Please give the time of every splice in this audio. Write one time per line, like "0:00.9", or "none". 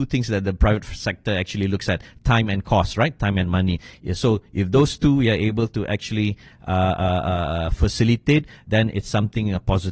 none